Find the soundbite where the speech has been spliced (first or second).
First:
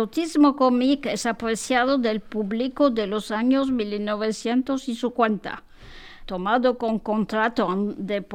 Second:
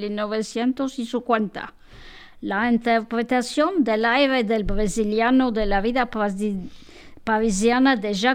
first